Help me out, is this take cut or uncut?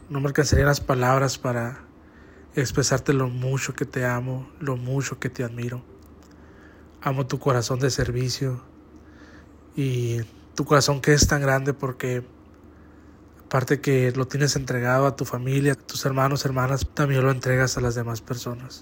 cut